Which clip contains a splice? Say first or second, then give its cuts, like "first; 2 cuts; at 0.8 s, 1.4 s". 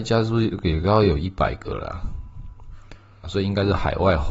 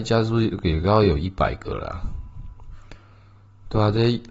first; 1 cut; at 3.2 s